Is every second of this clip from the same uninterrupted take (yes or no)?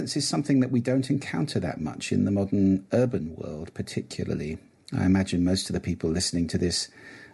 yes